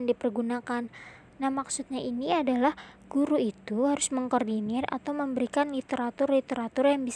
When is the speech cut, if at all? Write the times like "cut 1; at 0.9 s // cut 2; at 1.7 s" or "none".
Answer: cut 1; at 1.3 s